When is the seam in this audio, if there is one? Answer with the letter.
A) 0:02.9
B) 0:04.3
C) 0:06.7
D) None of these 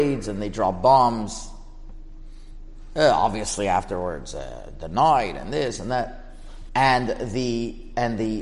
C